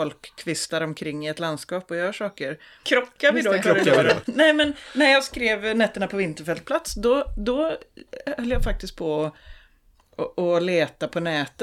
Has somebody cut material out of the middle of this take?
yes; 2 cuts; at 2.8 s, 4.2 s

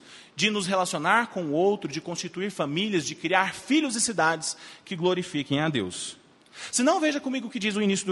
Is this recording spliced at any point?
no; 0 cuts

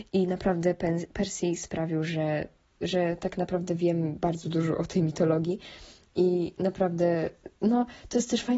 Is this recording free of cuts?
yes; 0 cuts

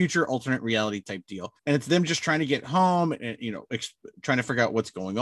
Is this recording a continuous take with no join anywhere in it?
no; 1 cut; at 1.6 s

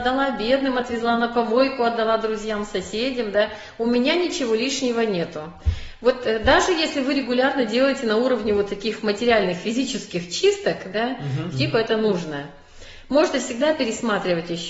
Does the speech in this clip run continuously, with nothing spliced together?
no; 1 cut; at 11.5 s

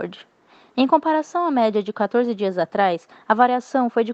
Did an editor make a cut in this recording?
no; 0 cuts

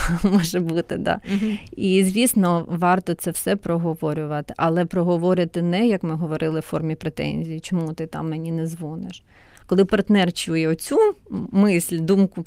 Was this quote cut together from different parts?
yes; 1 cut; at 9.6 s

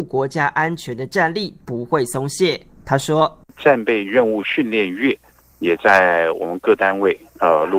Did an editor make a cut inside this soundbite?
no; 0 cuts

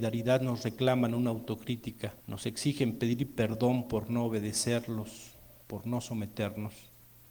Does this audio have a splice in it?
yes; 2 cuts; at 2.2 s, 5.6 s

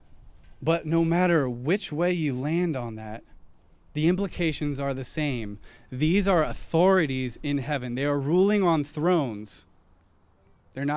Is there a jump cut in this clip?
no; 0 cuts

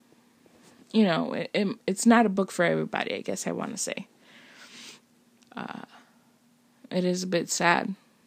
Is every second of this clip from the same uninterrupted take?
no; 1 cut; at 5.4 s

